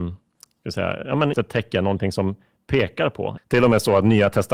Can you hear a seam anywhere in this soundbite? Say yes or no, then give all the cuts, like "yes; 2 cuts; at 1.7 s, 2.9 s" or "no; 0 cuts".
yes; 2 cuts; at 1.3 s, 3.4 s